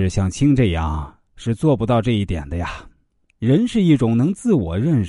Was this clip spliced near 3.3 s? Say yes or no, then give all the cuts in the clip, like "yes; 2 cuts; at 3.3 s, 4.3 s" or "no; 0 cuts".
yes; 1 cut; at 3.3 s